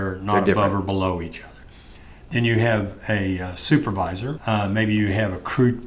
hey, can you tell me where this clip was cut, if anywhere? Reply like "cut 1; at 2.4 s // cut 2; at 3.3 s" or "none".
cut 1; at 4.4 s

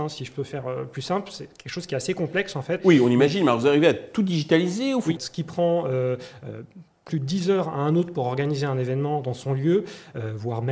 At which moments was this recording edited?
cut 1; at 2.8 s // cut 2; at 5.2 s

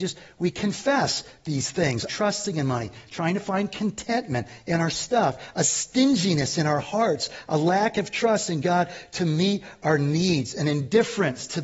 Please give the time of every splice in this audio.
cut 1; at 2.1 s

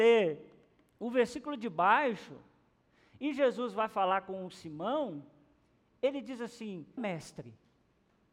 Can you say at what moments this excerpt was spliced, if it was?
cut 1; at 7.0 s

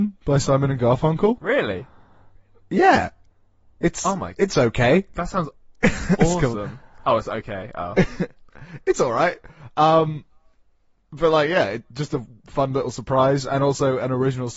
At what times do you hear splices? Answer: none

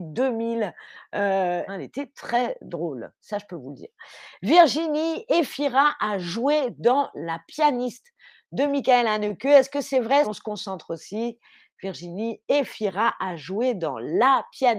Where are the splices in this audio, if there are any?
cut 1; at 1.7 s // cut 2; at 10.2 s

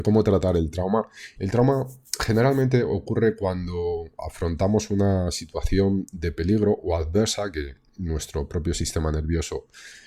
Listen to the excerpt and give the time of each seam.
cut 1; at 1.4 s

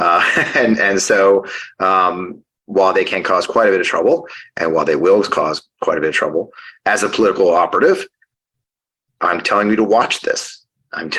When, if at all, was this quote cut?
none

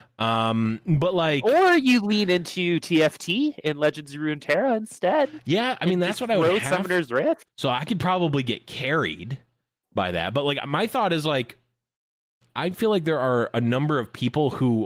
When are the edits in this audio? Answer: cut 1; at 7.4 s

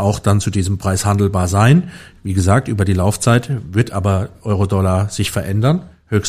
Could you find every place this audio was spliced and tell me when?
none

